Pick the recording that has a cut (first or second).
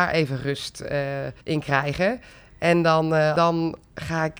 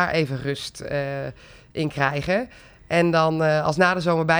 first